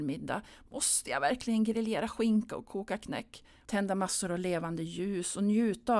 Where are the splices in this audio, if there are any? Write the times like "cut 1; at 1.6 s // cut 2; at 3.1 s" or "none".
cut 1; at 3.7 s